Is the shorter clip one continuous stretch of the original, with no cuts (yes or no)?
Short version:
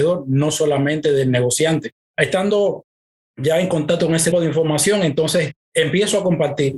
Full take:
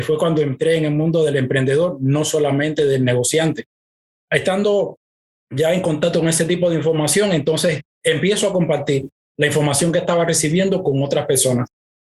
no